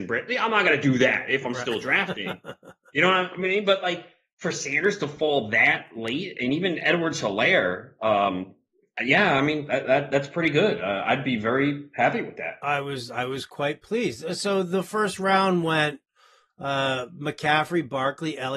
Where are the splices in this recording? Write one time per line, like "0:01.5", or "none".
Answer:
none